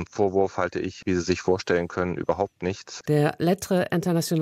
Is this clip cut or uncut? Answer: cut